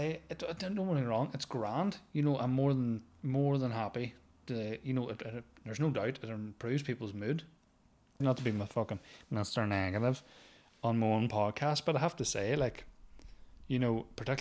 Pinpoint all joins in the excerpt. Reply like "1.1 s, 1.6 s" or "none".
5.2 s, 8.2 s